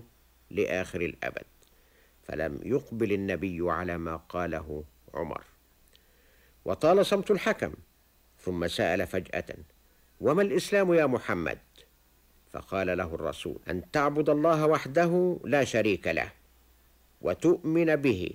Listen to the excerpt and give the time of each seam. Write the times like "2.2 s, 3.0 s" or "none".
13.6 s